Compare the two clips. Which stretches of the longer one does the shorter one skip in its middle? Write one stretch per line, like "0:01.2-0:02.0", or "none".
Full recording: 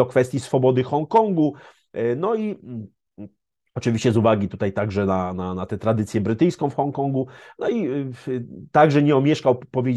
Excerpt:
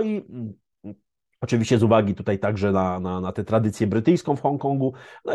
none